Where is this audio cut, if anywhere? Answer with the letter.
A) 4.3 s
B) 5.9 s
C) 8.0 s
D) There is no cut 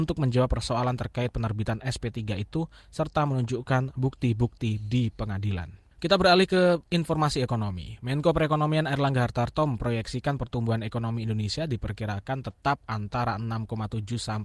B